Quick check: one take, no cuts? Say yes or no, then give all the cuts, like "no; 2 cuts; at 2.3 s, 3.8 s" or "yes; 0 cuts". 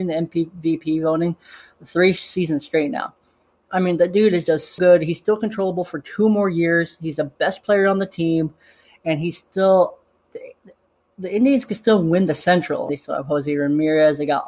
no; 2 cuts; at 4.8 s, 12.9 s